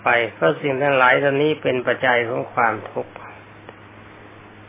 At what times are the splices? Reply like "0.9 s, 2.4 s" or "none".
2.0 s